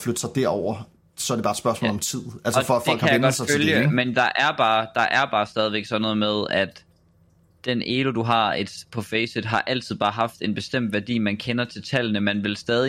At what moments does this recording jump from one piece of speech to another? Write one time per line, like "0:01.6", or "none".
none